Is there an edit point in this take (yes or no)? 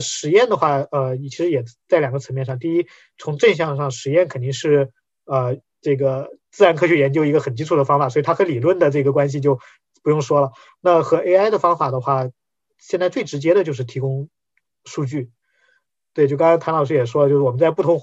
no